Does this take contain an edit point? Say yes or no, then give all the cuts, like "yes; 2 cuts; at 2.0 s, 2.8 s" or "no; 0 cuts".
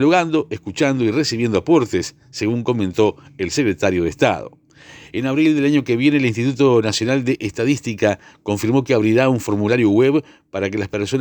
no; 0 cuts